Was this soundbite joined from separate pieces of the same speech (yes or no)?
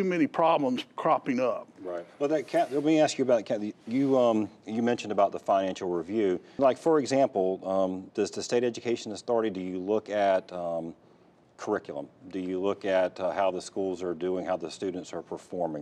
yes